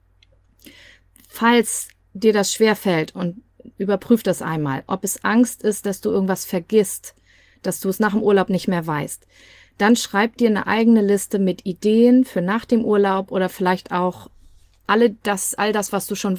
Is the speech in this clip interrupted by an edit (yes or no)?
no